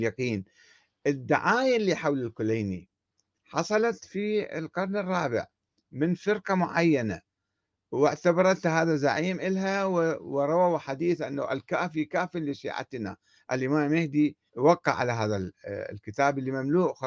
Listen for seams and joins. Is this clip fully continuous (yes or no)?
no